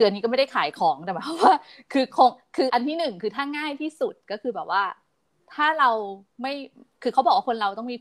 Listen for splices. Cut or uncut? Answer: cut